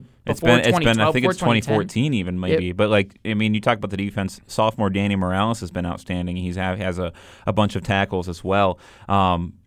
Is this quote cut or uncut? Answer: uncut